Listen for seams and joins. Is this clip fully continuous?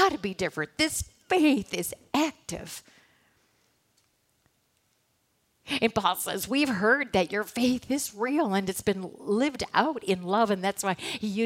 yes; 0 cuts

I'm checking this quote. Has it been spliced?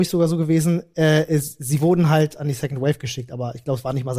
no; 0 cuts

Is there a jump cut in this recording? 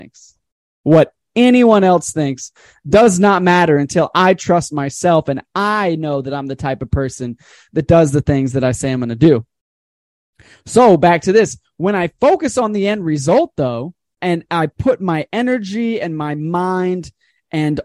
yes; 1 cut; at 14.2 s

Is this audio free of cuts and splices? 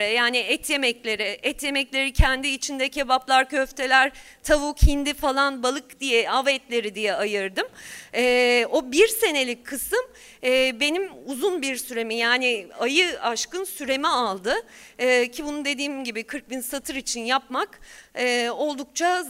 yes; 0 cuts

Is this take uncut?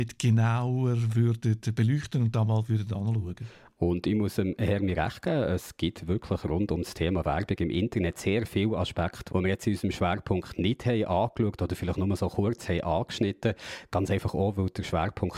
yes; 0 cuts

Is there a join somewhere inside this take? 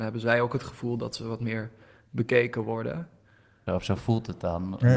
yes; 1 cut; at 3.7 s

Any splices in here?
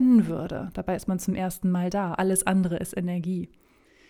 yes; 1 cut; at 2.2 s

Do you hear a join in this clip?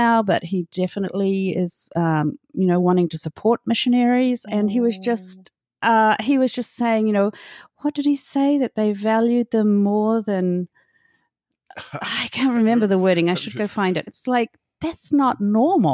yes; 2 cuts; at 4.4 s, 14.1 s

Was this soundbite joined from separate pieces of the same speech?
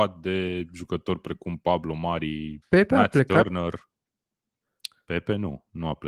yes; 1 cut; at 2.6 s

